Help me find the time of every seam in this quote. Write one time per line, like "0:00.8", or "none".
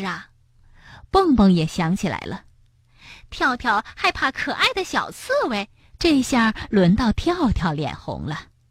0:06.0